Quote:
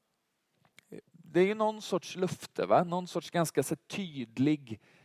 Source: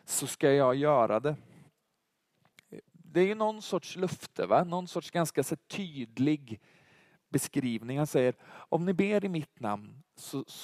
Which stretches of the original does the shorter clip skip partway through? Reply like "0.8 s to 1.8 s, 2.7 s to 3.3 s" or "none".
none